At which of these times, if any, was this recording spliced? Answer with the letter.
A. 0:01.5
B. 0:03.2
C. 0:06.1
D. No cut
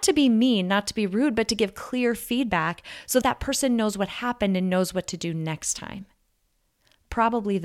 B